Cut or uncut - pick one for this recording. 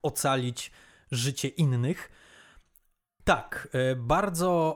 cut